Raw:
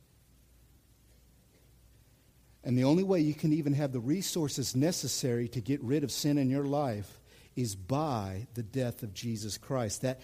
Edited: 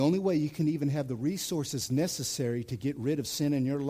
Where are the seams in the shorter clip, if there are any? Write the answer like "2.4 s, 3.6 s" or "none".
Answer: none